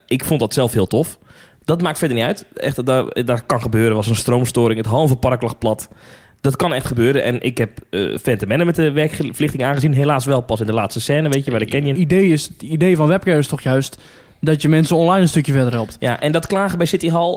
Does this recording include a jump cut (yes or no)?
yes